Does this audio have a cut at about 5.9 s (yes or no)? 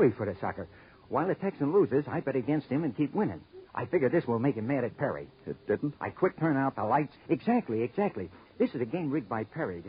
yes